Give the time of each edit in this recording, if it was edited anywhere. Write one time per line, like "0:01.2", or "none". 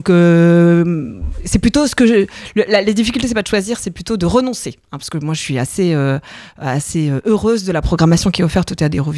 none